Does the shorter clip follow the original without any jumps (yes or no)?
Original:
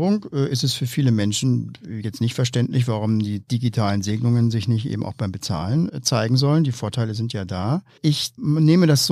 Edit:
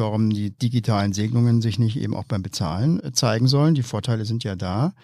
yes